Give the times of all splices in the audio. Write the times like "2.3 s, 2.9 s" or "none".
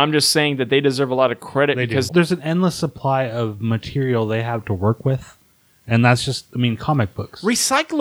2.1 s